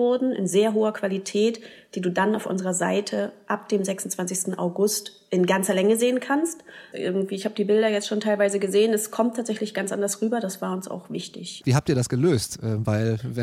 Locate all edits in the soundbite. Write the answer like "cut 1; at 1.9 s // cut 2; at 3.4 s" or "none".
cut 1; at 6.9 s // cut 2; at 11.6 s